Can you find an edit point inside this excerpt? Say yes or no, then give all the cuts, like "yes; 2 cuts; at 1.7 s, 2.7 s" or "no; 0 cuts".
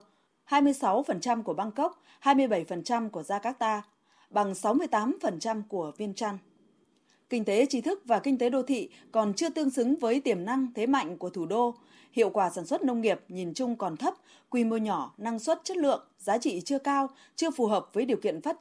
no; 0 cuts